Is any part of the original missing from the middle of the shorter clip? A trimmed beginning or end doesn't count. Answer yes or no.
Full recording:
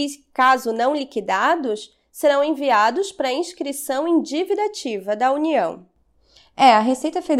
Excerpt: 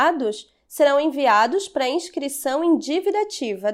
no